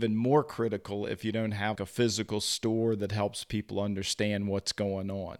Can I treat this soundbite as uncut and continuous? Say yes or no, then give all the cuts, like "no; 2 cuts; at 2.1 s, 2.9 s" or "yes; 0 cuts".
no; 1 cut; at 1.8 s